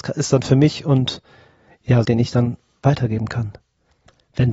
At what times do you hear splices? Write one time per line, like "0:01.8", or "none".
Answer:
0:02.0